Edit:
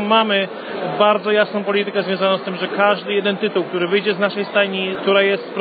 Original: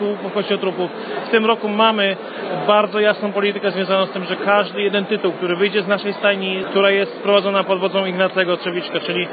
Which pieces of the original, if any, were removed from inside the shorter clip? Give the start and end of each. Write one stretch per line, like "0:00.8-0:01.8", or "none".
none